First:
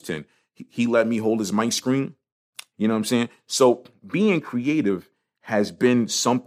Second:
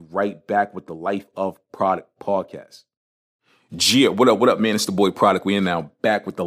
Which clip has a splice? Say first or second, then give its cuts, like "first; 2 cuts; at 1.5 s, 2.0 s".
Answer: first; 1 cut; at 2.7 s